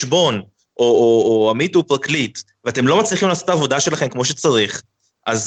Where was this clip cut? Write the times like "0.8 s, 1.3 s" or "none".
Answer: none